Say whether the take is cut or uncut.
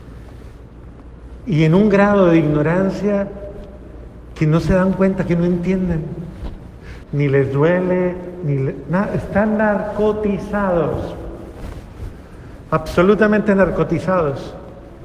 cut